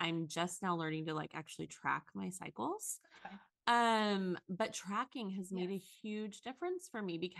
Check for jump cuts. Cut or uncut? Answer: uncut